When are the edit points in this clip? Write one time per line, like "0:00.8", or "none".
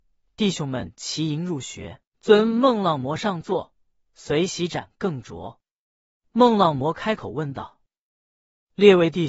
0:02.1